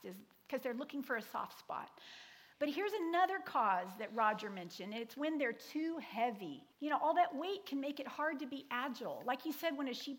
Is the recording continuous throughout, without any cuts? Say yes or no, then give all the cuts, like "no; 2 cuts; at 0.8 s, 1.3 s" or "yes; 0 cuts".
no; 1 cut; at 6.7 s